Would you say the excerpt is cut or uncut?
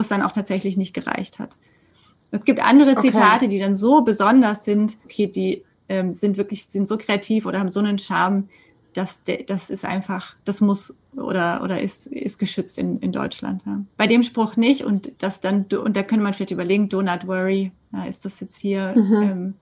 cut